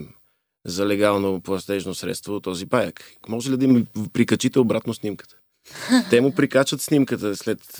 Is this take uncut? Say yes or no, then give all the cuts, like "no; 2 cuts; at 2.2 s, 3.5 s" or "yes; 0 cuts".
no; 1 cut; at 3.2 s